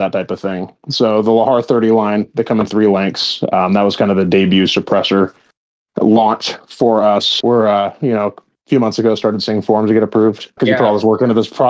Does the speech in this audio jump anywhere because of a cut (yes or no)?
yes